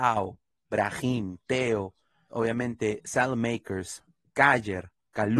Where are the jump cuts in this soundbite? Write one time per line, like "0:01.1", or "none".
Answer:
0:02.3